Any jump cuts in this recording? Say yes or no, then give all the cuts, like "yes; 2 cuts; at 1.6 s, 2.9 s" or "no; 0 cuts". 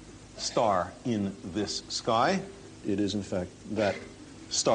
yes; 1 cut; at 2.8 s